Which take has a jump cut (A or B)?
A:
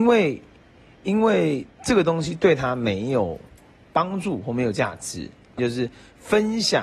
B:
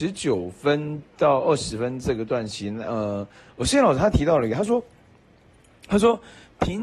A